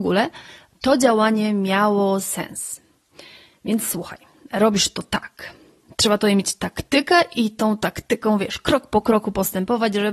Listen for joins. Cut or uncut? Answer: uncut